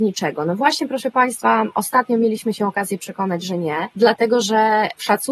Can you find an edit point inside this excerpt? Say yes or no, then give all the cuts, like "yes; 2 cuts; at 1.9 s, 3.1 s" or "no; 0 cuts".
no; 0 cuts